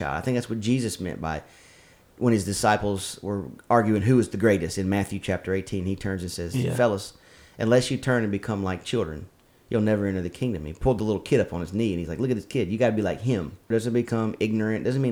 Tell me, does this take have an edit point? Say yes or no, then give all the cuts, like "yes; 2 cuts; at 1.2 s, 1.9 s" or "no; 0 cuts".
yes; 1 cut; at 13.7 s